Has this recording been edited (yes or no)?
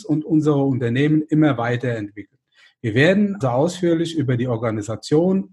yes